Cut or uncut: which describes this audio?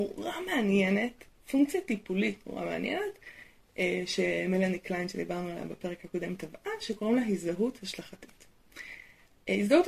uncut